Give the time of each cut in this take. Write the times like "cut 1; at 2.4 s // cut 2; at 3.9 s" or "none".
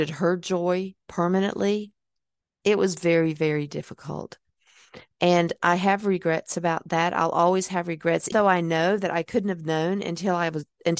cut 1; at 8.3 s

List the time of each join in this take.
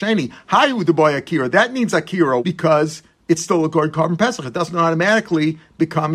cut 1; at 2.4 s // cut 2; at 4.4 s

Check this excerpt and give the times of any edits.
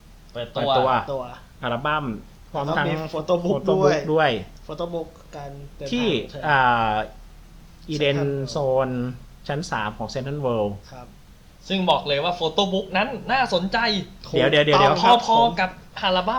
none

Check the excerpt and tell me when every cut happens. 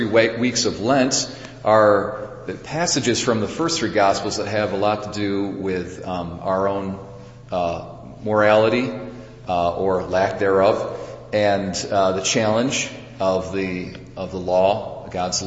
none

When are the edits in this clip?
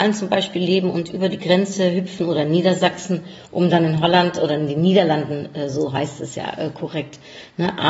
none

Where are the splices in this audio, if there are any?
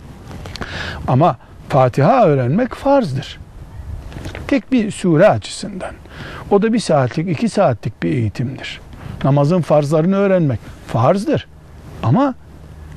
cut 1; at 1.0 s

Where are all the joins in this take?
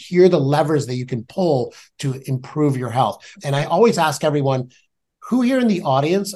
cut 1; at 3.3 s

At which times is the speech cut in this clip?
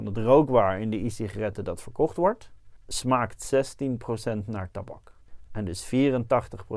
none

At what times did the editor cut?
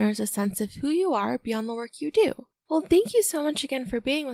cut 1; at 2.5 s

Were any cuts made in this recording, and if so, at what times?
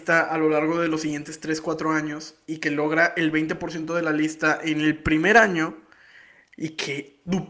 none

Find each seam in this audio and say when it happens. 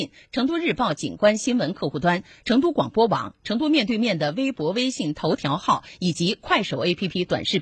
cut 1; at 2.4 s

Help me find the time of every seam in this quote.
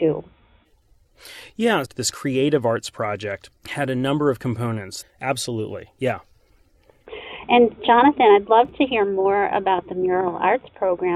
cut 1; at 1.9 s // cut 2; at 5.0 s

